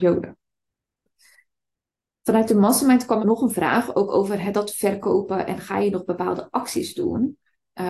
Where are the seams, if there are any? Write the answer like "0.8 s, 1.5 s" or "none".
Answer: 3.2 s